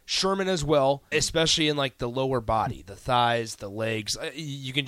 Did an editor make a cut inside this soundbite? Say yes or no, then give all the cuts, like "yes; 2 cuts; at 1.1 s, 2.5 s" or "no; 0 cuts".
yes; 1 cut; at 1.1 s